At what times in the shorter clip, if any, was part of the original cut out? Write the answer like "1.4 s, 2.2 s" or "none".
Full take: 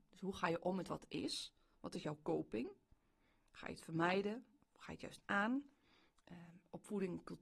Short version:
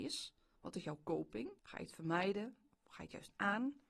1.6 s